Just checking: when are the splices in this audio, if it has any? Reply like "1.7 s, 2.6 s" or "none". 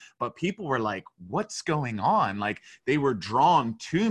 none